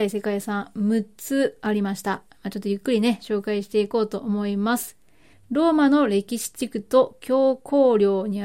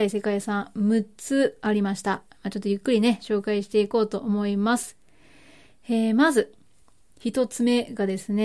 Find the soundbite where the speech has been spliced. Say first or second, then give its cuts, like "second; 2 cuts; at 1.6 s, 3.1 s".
first; 1 cut; at 5.3 s